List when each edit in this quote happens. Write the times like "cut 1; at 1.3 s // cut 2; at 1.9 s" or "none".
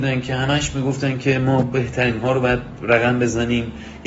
cut 1; at 1.6 s